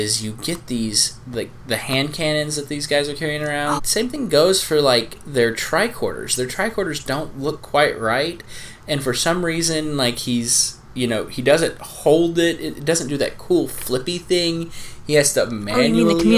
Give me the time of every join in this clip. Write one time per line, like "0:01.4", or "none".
0:03.8